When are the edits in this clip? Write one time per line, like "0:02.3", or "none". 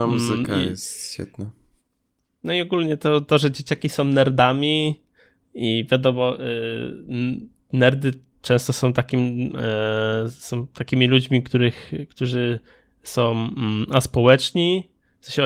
none